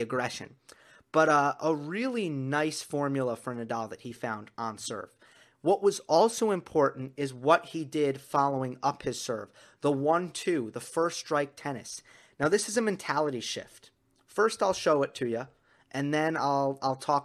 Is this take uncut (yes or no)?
yes